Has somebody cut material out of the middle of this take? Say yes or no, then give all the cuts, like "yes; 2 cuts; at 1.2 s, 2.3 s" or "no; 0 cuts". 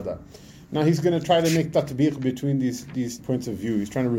yes; 1 cut; at 3.2 s